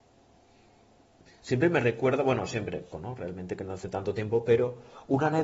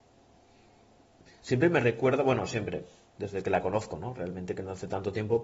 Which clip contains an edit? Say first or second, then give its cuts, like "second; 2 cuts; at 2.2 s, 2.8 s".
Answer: first; 1 cut; at 2.9 s